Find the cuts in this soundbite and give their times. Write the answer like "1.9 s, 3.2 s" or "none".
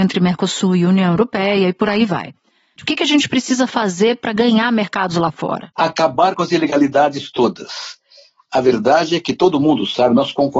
2.8 s